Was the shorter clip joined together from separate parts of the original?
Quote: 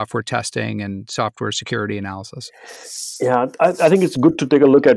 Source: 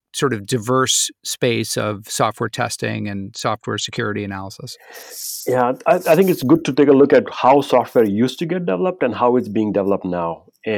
no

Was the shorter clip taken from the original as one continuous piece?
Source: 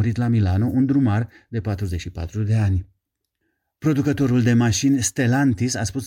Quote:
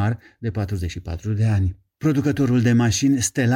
no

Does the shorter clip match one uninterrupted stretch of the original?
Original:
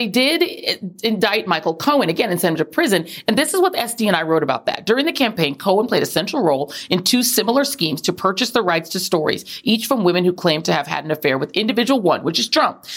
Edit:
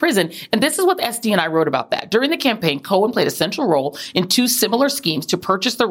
yes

